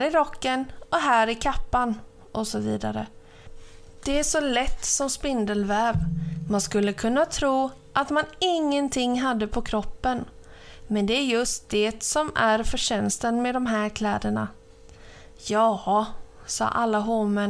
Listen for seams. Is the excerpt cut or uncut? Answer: uncut